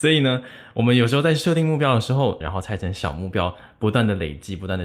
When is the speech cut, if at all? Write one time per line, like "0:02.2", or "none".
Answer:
0:02.4